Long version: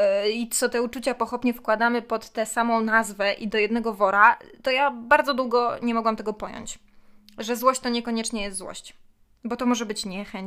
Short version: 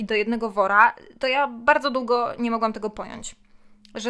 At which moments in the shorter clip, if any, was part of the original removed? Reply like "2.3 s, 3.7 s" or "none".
none